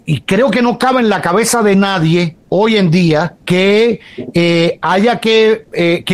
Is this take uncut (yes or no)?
no